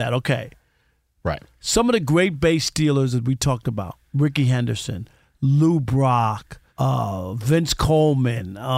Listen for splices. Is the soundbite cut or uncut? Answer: cut